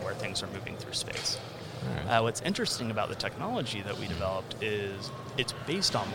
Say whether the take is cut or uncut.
uncut